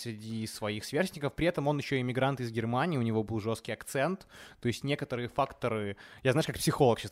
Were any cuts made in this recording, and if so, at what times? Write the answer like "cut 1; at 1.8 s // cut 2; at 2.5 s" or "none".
none